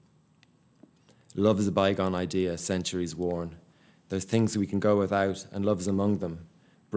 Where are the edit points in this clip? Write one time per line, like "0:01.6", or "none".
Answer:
none